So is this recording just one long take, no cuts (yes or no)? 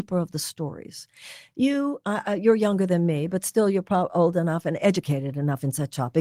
yes